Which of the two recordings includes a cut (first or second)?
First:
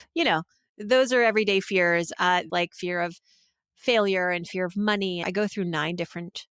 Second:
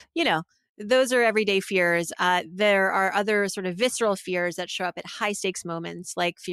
first